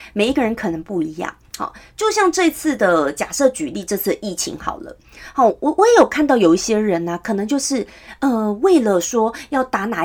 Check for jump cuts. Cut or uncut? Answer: uncut